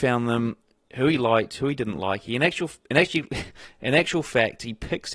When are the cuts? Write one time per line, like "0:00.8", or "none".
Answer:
none